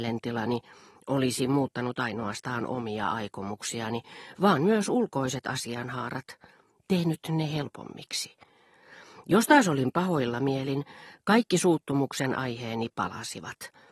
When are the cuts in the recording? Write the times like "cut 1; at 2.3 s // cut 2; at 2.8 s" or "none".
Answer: none